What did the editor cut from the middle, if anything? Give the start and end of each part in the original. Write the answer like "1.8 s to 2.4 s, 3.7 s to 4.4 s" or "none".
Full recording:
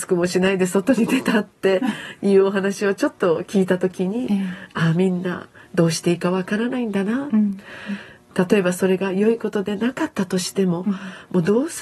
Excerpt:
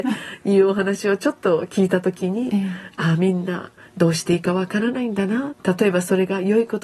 7.3 s to 8.2 s

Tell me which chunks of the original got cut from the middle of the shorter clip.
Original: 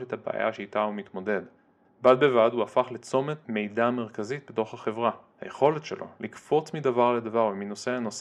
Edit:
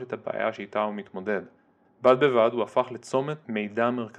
none

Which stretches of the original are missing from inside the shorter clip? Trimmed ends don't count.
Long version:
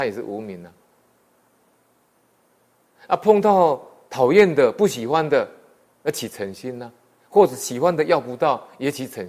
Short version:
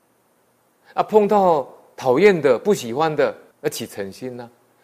5.6 s to 5.9 s

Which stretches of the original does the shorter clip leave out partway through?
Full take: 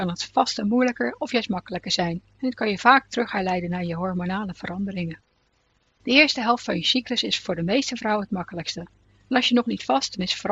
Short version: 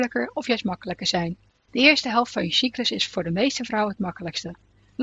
2.3 s to 5.8 s

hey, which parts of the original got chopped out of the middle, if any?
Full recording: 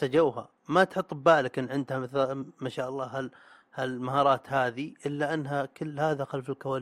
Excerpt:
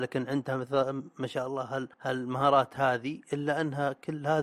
3.4 s to 3.7 s

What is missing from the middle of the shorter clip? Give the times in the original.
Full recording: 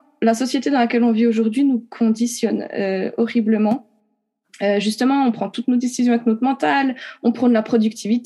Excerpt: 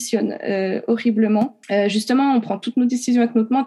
3.9 s to 4.5 s

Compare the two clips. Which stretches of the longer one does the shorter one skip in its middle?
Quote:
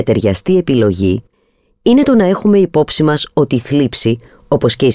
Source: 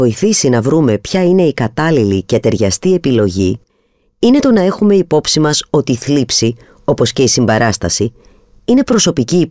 none

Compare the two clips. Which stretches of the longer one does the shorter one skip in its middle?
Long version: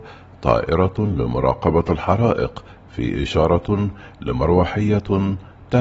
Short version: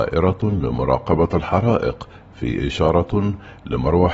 none

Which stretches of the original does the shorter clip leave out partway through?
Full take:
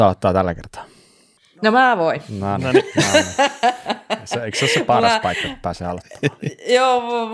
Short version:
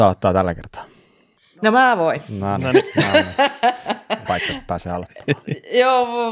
4.3 s to 5.2 s

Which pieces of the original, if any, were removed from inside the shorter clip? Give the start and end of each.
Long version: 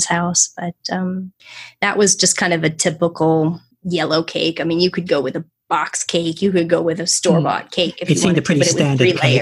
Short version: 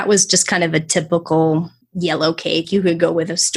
4.5 s to 6.3 s

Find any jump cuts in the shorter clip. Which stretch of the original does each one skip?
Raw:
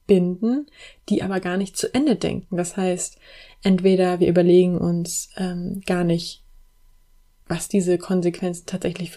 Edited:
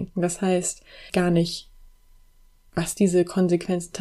3.4 s to 5.8 s

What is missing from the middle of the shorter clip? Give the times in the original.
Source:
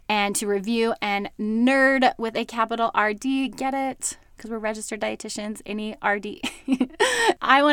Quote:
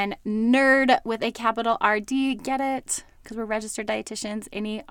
none

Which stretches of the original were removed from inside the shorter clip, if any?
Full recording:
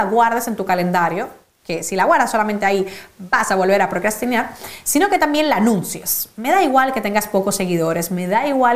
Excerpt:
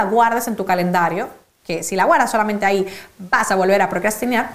none

